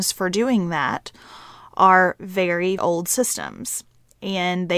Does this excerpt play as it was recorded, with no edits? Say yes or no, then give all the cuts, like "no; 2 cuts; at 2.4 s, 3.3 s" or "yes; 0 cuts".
no; 1 cut; at 2.8 s